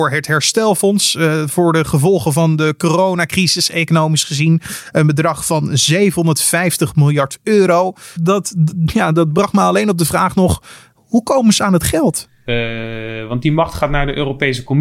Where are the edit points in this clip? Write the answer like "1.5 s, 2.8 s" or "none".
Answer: 8.2 s, 12.5 s